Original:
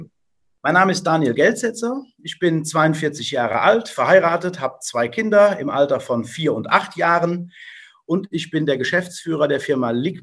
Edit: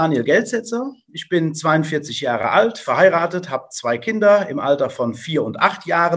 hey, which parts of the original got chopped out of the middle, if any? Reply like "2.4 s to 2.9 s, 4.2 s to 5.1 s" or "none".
none